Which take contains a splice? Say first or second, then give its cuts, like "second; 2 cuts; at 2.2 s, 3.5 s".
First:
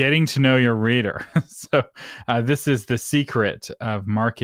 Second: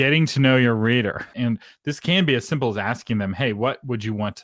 second; 1 cut; at 1.3 s